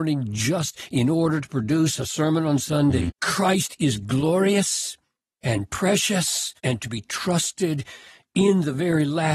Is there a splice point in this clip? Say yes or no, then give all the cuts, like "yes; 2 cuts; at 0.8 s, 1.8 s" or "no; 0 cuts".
yes; 2 cuts; at 3.1 s, 6.6 s